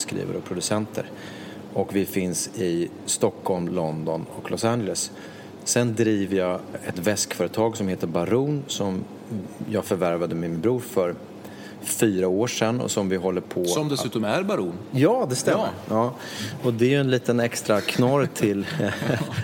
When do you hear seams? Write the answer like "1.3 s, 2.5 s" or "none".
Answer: 6.7 s